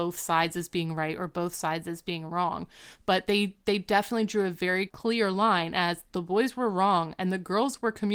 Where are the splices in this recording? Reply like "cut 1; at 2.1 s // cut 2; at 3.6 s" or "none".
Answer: cut 1; at 4.9 s

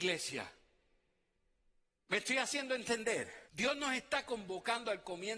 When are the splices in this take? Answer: cut 1; at 3.5 s

